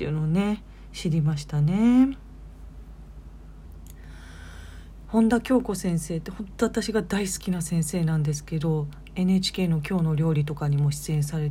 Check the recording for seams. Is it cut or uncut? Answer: cut